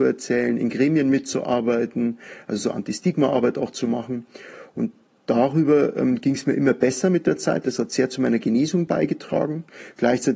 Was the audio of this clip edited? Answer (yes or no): no